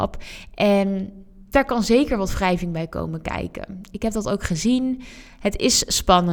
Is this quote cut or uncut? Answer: uncut